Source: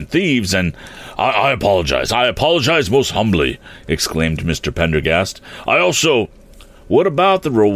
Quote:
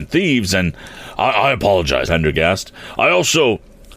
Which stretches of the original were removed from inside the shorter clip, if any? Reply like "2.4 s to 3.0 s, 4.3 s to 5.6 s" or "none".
2.1 s to 4.7 s